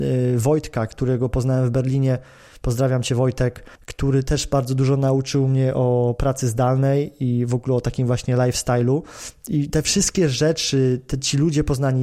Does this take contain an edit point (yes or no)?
yes